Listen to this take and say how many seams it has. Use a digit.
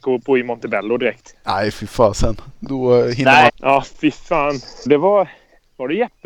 2